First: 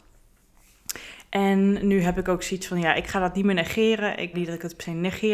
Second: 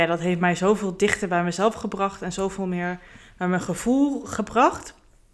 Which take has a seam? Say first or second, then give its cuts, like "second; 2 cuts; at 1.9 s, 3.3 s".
first; 1 cut; at 4.3 s